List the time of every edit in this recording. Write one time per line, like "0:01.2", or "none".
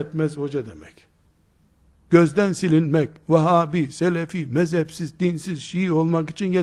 none